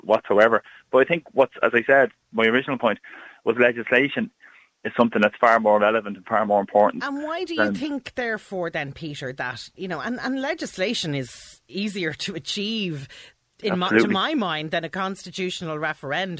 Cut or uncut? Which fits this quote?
uncut